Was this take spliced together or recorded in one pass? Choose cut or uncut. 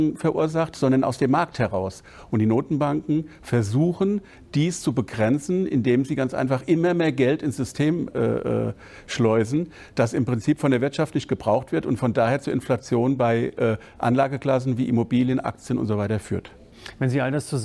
uncut